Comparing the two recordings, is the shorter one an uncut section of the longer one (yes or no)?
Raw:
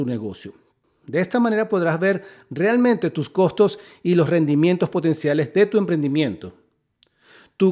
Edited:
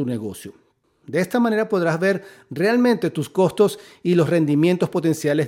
yes